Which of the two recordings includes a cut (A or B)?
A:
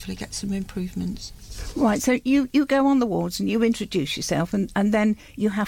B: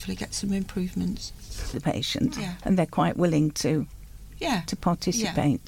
B